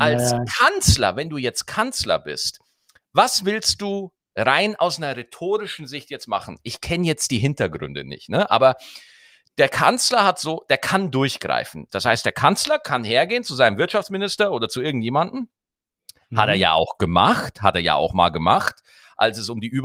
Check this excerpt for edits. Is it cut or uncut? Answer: cut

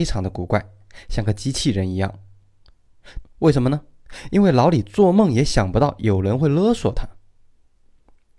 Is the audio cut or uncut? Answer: cut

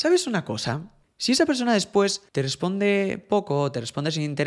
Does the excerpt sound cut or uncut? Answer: cut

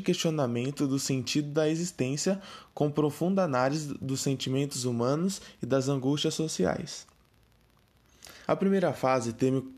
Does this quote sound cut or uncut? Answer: cut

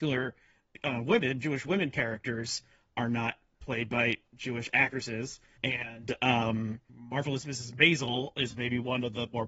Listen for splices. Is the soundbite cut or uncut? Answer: uncut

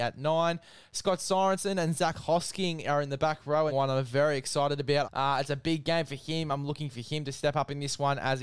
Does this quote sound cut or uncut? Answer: cut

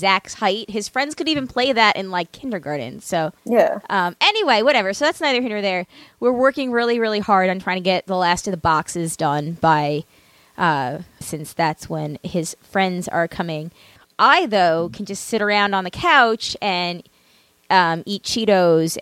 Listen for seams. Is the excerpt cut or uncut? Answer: cut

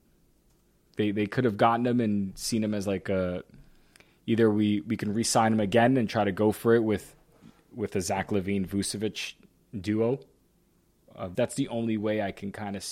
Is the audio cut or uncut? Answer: cut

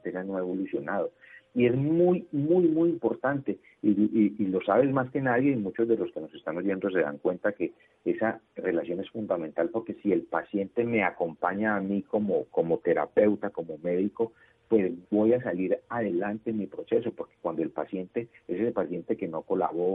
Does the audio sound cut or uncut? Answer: uncut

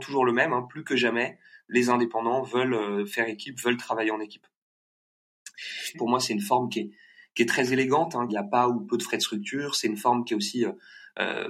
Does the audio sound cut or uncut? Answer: cut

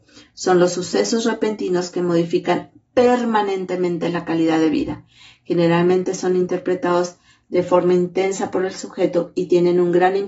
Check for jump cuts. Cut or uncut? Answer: uncut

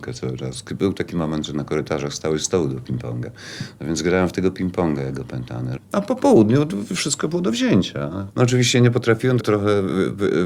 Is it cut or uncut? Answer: cut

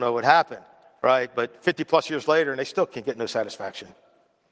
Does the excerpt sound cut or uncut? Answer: uncut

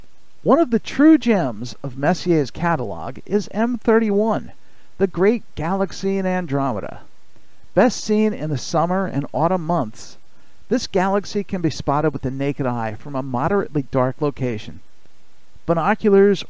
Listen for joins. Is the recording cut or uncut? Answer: uncut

